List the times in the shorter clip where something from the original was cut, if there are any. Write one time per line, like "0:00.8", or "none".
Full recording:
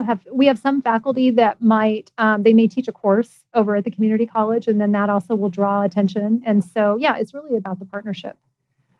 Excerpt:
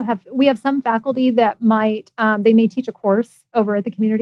none